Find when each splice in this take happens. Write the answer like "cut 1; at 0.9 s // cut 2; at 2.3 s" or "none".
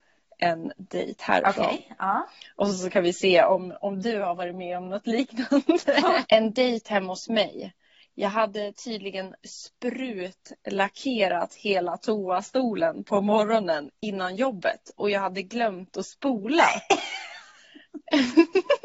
cut 1; at 6.2 s // cut 2; at 13.9 s